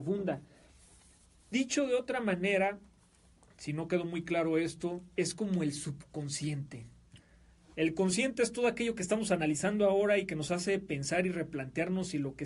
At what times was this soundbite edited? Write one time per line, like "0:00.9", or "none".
none